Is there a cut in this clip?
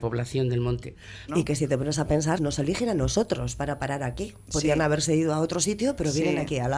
yes; 2 cuts; at 1.3 s, 2.4 s

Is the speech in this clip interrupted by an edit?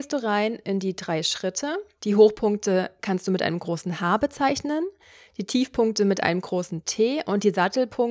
yes; 1 cut; at 2.0 s

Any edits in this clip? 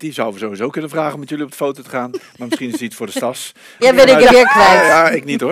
yes; 1 cut; at 3.8 s

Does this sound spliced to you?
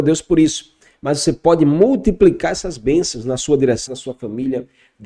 yes; 1 cut; at 3.9 s

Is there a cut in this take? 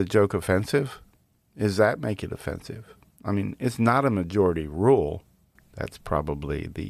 yes; 2 cuts; at 1.4 s, 5.6 s

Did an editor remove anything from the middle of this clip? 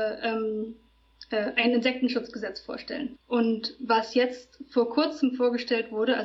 yes; 1 cut; at 3.1 s

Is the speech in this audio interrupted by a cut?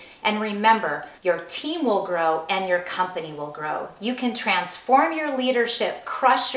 yes; 1 cut; at 1.2 s

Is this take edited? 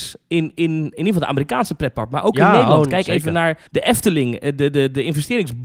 yes; 1 cut; at 3.7 s

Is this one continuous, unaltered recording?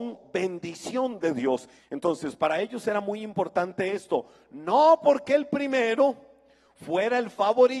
no; 1 cut; at 1.8 s

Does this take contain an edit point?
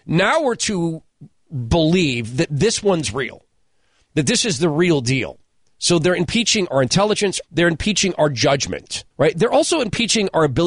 yes; 2 cuts; at 7.4 s, 9.1 s

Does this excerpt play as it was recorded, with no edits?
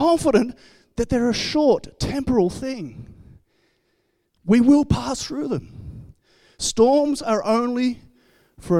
yes; 0 cuts

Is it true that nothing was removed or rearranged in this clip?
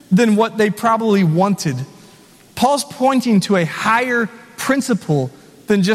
yes; 0 cuts

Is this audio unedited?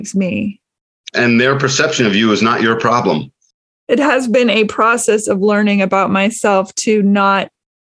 no; 1 cut; at 1.1 s

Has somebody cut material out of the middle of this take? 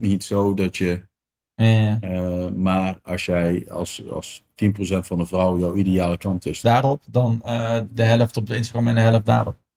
yes; 2 cuts; at 1.6 s, 6.6 s

